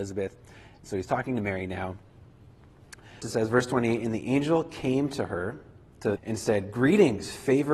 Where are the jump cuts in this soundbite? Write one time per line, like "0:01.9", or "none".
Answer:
0:03.2
0:06.2